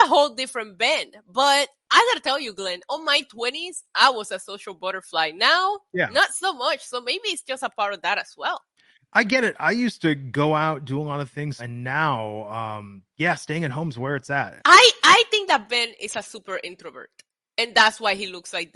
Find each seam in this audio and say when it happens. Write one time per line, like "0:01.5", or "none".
0:11.6
0:14.6